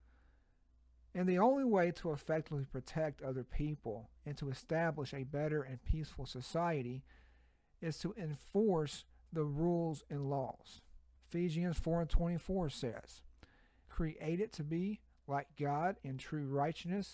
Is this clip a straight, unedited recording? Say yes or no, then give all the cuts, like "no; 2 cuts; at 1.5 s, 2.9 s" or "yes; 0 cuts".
no; 2 cuts; at 11.2 s, 13.8 s